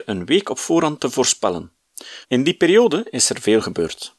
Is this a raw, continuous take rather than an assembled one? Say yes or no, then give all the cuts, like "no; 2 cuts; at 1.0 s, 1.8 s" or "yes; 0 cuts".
no; 1 cut; at 2.2 s